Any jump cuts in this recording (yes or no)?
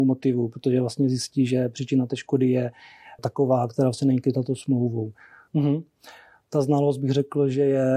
yes